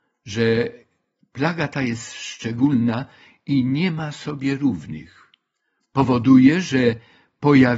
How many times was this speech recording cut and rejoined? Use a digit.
0